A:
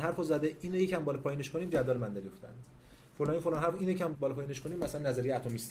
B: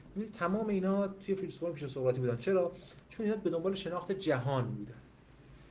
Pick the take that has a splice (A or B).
A